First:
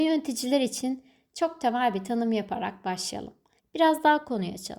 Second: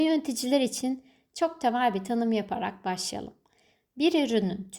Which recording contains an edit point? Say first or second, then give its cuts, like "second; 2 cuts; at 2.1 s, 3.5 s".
first; 1 cut; at 3.6 s